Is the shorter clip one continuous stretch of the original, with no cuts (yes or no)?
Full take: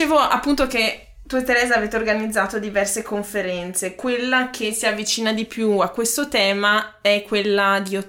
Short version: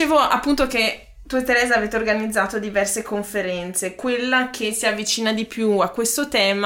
yes